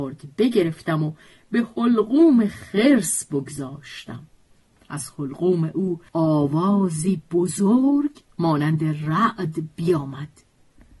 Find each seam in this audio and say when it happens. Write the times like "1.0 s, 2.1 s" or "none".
6.1 s, 8.3 s